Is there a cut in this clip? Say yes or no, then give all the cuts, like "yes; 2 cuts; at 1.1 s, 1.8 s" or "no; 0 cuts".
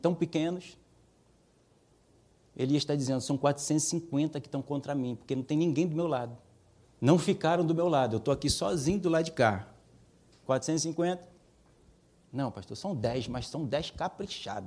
yes; 2 cuts; at 6.8 s, 10.4 s